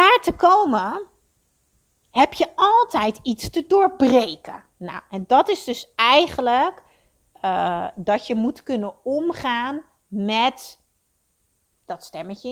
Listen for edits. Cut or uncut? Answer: uncut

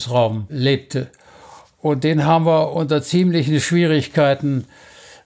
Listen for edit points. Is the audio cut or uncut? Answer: uncut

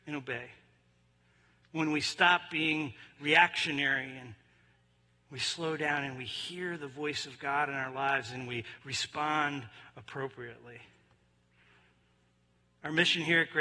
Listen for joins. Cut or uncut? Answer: uncut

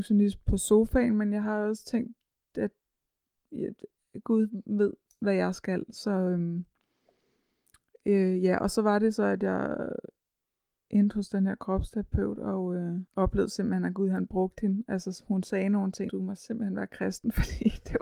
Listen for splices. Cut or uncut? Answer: cut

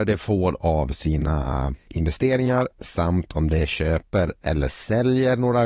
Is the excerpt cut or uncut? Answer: uncut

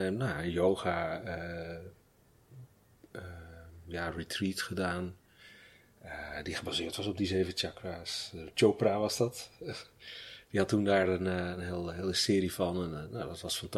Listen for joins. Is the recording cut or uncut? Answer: uncut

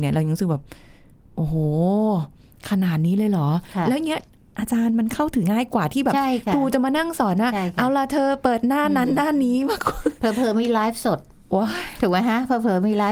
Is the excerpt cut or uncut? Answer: cut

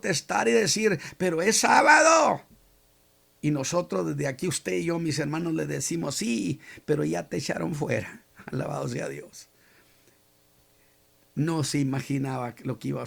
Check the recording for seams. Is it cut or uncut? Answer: uncut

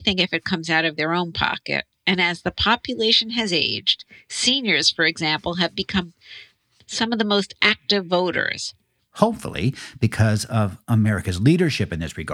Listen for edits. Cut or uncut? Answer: cut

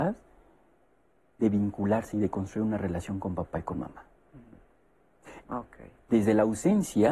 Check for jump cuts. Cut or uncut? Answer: cut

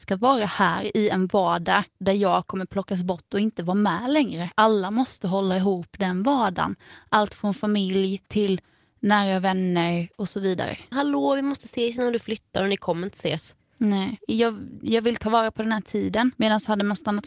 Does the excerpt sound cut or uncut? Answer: cut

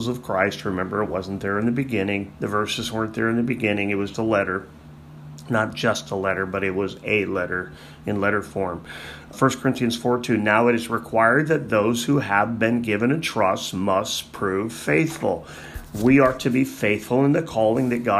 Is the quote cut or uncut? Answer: cut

